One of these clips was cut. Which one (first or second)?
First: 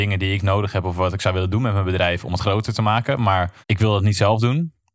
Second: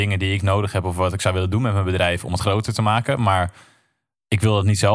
first